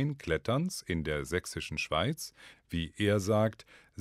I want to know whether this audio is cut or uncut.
cut